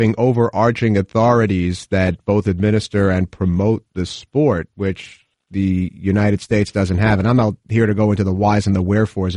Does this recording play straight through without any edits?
yes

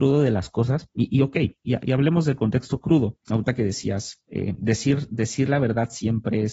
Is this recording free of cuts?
no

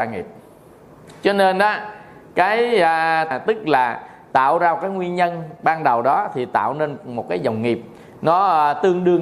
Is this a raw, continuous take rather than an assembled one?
no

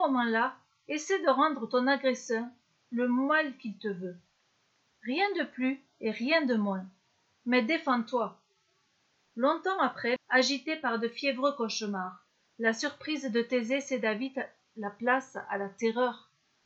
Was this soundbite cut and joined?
yes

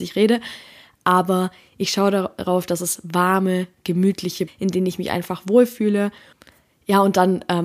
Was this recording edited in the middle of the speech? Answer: yes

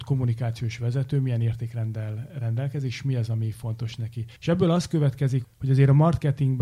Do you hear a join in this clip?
yes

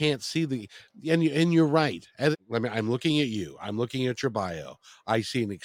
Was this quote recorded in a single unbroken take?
no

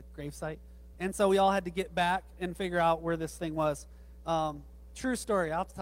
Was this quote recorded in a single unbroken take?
no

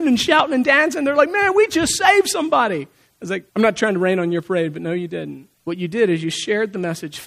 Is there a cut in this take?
yes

